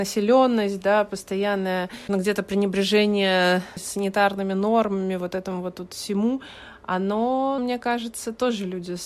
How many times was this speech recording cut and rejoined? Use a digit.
2